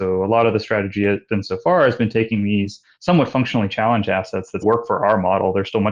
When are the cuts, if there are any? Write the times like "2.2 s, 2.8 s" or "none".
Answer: 4.6 s